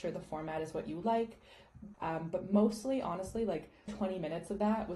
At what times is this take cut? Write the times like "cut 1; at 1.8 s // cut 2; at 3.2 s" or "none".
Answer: cut 1; at 1.9 s // cut 2; at 3.9 s